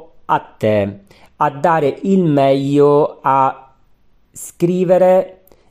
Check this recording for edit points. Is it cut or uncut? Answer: uncut